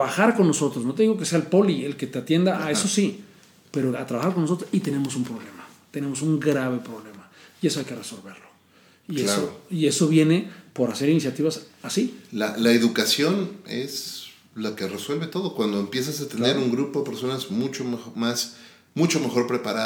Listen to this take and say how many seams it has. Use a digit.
0